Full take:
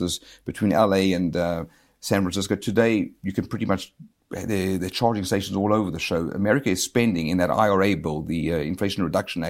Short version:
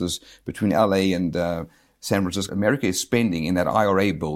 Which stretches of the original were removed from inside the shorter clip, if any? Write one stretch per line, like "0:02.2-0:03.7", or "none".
0:02.5-0:06.3